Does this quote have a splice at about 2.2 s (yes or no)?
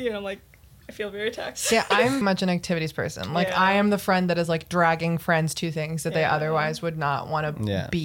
yes